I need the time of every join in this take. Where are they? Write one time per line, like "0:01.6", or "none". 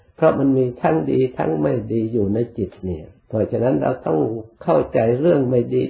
0:03.2
0:04.5